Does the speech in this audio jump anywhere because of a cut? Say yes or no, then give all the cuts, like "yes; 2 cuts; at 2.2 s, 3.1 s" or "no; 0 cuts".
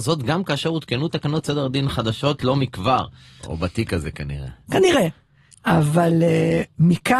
yes; 1 cut; at 3.4 s